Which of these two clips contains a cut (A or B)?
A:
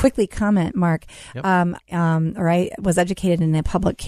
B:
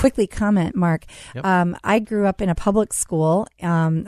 A